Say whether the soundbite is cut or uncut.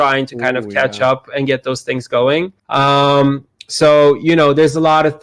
cut